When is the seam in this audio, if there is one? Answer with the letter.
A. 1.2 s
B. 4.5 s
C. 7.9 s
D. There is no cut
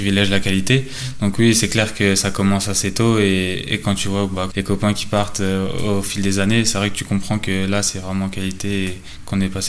B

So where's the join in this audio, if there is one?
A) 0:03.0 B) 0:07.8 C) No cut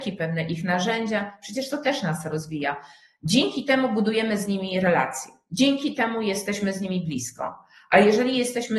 C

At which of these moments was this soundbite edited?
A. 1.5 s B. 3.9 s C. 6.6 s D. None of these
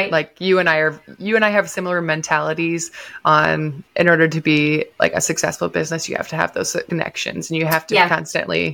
B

